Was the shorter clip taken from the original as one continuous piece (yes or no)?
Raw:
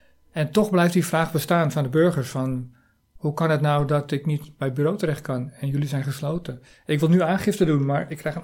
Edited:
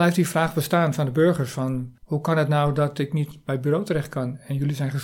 no